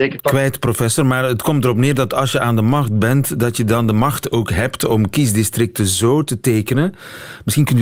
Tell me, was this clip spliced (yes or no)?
no